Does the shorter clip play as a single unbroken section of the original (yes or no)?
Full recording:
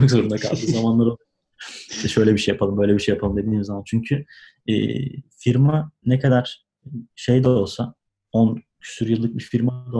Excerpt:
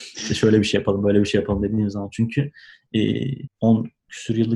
no